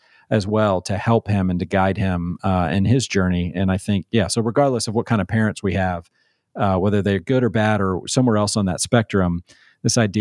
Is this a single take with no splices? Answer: yes; 0 cuts

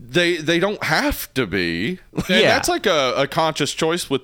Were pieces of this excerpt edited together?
yes; 1 cut; at 2.3 s

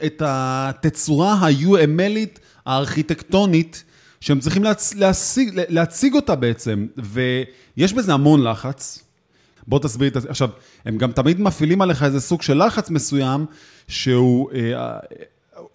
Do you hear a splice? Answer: yes; 1 cut; at 9.6 s

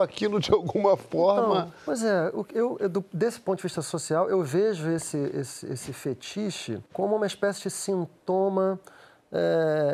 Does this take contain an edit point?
yes; 1 cut; at 6.9 s

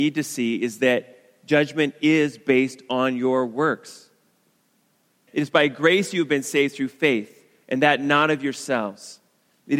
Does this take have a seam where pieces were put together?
yes; 1 cut; at 5.3 s

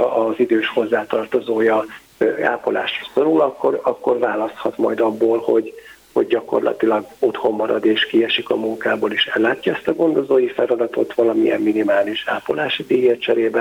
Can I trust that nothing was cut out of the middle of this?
yes; 0 cuts

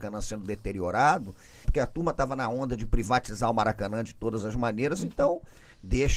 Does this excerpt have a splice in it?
yes; 1 cut; at 1.6 s

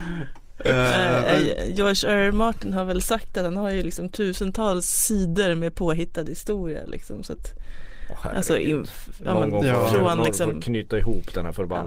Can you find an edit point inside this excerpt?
no; 0 cuts

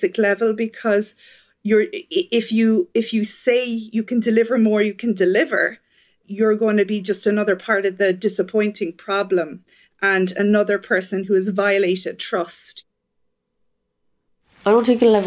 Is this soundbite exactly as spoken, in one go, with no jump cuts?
no; 1 cut; at 6.2 s

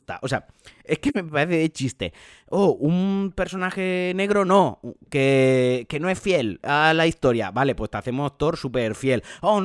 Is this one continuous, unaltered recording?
yes; 0 cuts

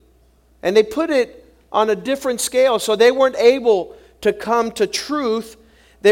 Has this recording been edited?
no; 0 cuts

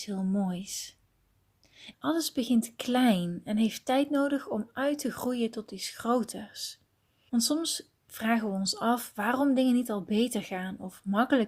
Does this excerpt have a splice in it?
yes; 2 cuts; at 1.9 s, 7.3 s

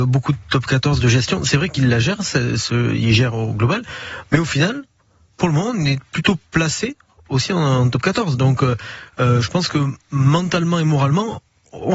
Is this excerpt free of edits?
yes; 0 cuts

